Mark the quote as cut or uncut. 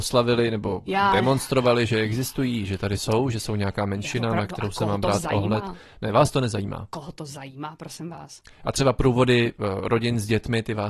uncut